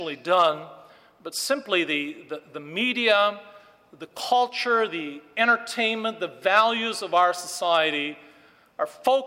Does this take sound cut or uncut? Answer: uncut